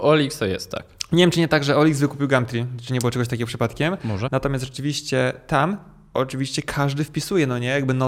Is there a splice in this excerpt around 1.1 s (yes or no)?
no